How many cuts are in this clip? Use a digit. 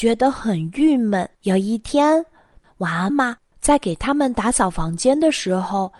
2